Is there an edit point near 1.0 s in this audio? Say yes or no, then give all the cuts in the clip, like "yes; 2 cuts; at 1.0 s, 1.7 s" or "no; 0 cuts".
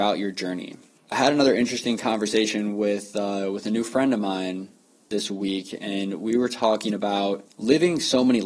yes; 1 cut; at 1.0 s